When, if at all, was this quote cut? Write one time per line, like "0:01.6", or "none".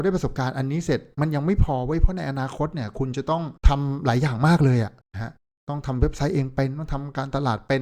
0:03.6
0:05.0